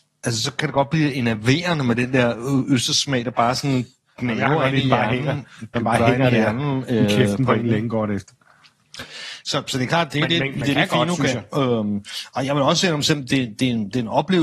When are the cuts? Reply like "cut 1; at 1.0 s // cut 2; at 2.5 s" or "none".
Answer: none